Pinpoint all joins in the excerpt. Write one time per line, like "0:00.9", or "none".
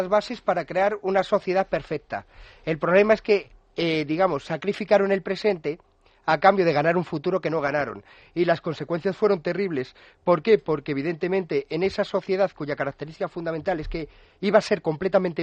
none